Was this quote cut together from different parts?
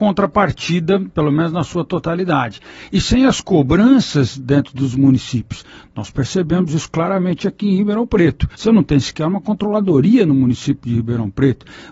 yes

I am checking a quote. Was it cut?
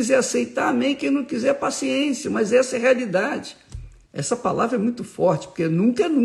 yes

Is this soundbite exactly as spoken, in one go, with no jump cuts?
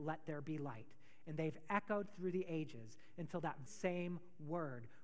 no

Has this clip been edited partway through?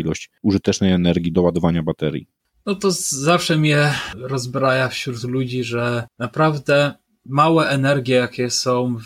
yes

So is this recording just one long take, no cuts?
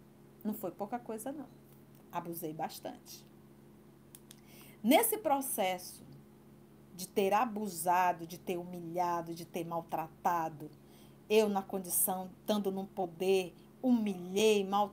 yes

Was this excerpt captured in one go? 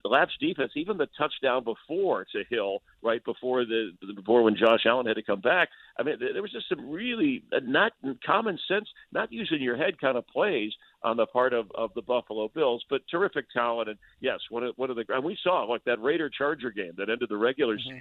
no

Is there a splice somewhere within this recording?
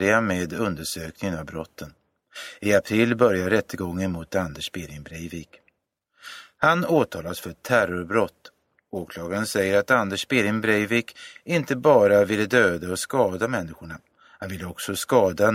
no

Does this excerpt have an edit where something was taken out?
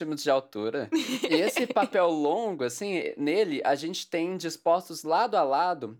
no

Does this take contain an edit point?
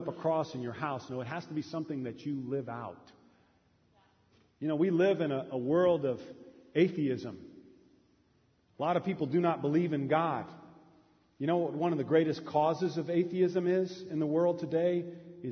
no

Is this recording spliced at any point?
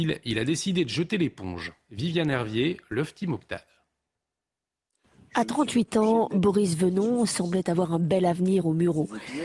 no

